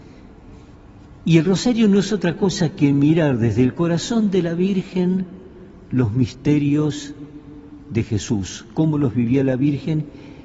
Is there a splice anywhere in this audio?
yes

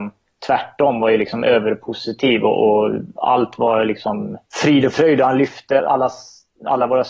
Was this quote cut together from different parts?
yes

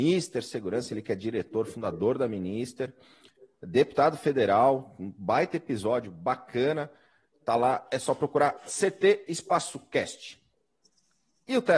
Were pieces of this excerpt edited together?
no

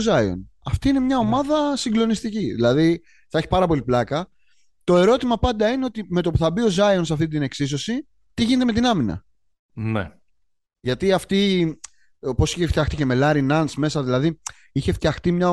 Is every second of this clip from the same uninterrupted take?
yes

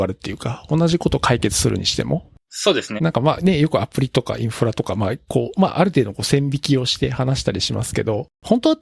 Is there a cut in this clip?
yes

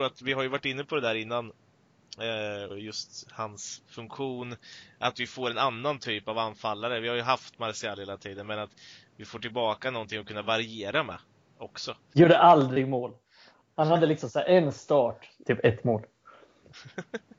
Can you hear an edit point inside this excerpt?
yes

